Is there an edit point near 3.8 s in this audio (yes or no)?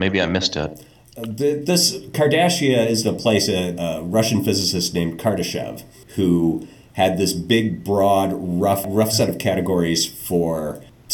yes